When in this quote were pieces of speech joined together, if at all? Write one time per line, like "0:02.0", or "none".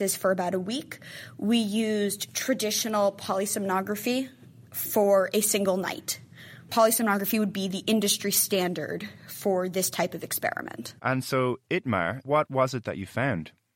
0:11.0